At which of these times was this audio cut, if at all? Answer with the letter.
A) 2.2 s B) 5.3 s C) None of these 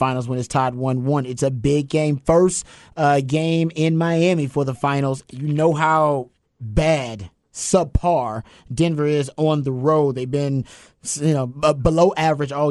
B